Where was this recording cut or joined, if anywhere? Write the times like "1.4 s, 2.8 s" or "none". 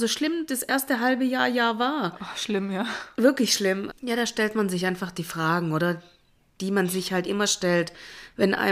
3.9 s